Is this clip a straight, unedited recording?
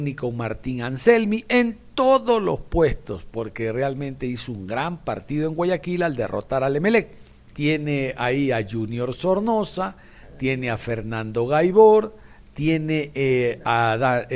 no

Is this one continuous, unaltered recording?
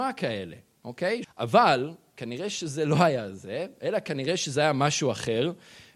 no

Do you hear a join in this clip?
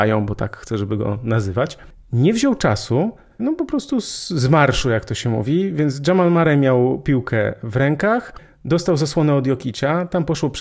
yes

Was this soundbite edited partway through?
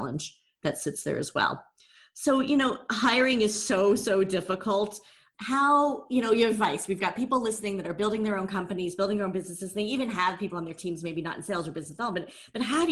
no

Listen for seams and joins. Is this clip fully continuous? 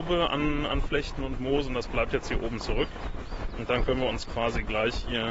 yes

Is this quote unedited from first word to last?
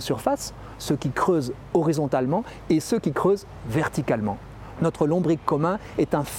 no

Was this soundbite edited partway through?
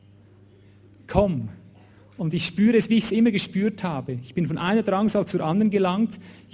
no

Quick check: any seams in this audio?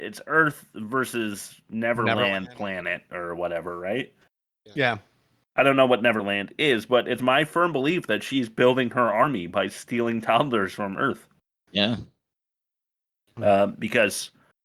yes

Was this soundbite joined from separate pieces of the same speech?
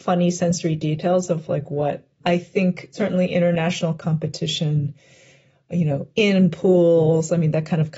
yes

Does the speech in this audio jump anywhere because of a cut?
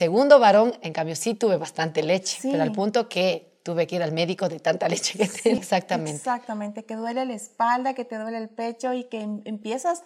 yes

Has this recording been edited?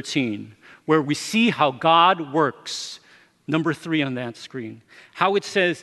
no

